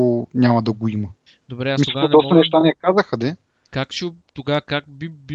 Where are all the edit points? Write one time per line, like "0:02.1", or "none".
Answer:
none